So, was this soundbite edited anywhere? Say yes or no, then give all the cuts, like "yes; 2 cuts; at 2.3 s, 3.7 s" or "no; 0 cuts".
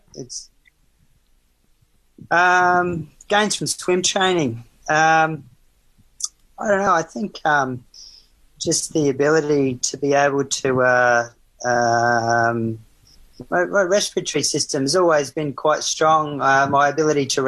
no; 0 cuts